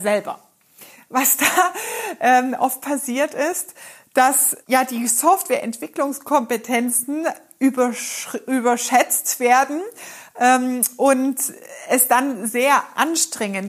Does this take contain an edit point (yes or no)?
yes